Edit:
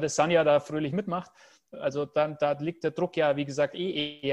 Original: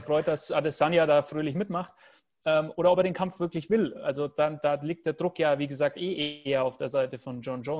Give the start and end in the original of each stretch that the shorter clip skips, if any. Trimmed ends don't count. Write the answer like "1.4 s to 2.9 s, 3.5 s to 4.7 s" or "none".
2.3 s to 3.9 s